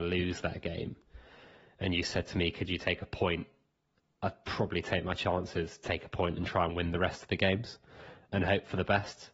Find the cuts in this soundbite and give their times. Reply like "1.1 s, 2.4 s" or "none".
8.3 s